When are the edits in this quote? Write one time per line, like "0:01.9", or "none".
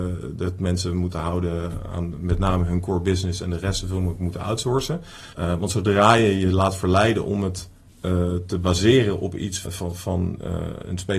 0:05.3
0:09.6

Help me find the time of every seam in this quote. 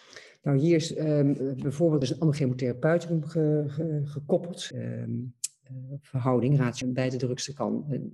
0:02.0
0:04.7
0:06.8

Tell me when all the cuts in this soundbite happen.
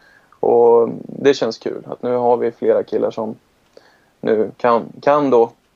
none

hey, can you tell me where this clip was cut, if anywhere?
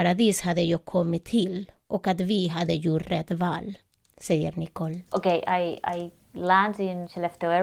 0:05.1

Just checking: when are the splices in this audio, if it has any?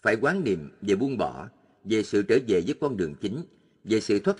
none

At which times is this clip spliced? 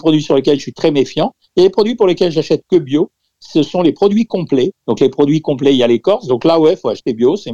0:04.8

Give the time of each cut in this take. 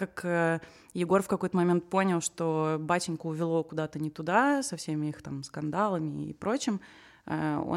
none

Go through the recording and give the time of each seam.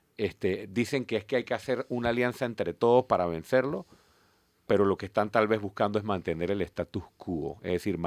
none

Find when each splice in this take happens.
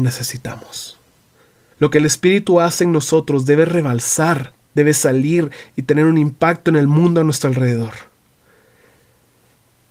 0:01.7
0:04.6

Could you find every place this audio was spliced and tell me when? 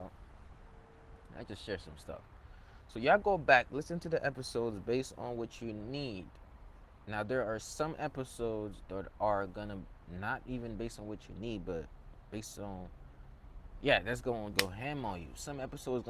0:14.5

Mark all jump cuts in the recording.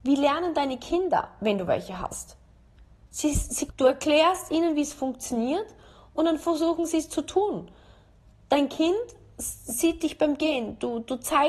0:03.7

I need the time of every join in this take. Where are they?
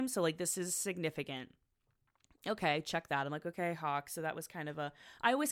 none

